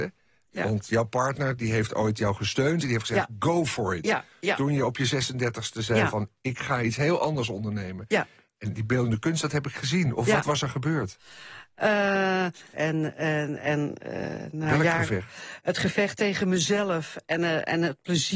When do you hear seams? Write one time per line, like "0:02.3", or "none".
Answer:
0:12.7